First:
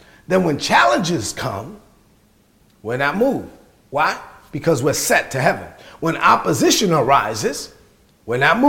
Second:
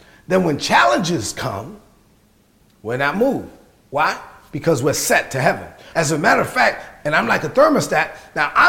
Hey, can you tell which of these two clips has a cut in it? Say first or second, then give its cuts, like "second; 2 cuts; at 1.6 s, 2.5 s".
second; 2 cuts; at 5.9 s, 7.0 s